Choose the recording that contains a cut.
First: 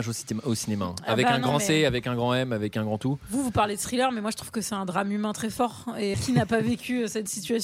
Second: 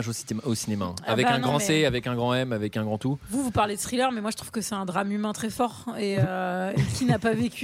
first; 1 cut; at 6.1 s

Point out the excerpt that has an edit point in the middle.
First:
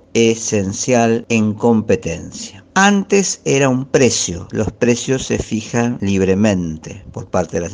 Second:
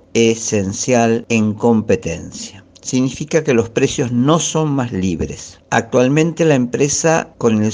first; 1 cut; at 2.7 s

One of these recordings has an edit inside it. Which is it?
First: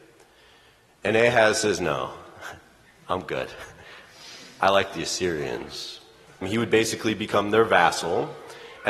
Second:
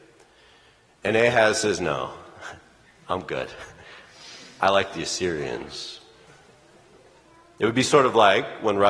first; 1 cut; at 6.4 s

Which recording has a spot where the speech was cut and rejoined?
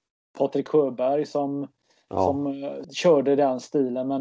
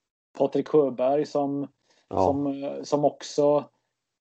first; 1 cut; at 2.8 s

